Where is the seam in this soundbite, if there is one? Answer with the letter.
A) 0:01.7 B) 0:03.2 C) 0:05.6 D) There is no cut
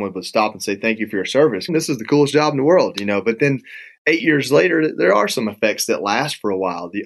A